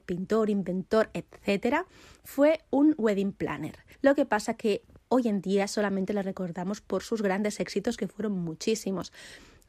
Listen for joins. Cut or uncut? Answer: cut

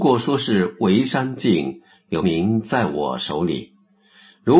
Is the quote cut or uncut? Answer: cut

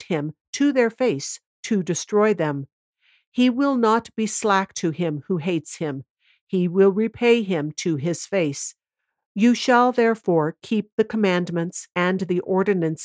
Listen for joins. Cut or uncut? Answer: cut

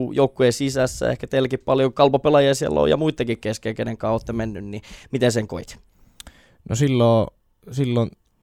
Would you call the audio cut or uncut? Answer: uncut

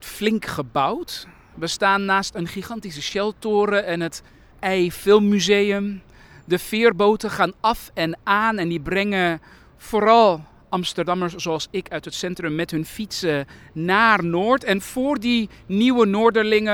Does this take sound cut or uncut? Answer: uncut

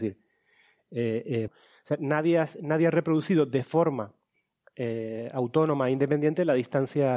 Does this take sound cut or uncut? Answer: cut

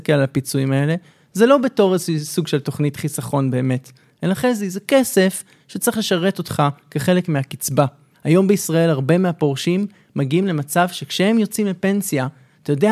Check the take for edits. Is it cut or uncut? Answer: uncut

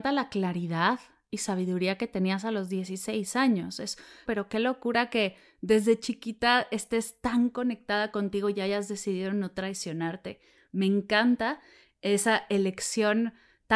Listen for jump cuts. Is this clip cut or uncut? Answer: cut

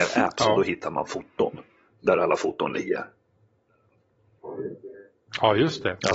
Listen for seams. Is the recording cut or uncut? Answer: uncut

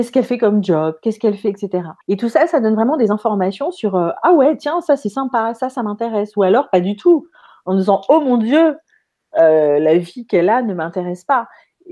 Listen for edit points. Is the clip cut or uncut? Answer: cut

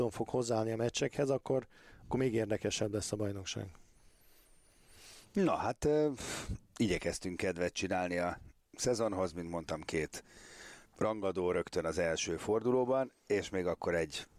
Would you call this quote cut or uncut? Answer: cut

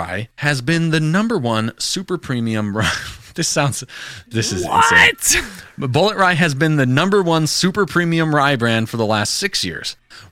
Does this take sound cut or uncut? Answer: uncut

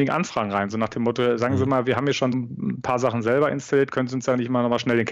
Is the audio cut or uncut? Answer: cut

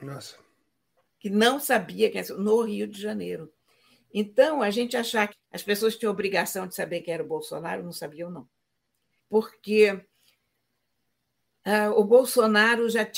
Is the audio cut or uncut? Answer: cut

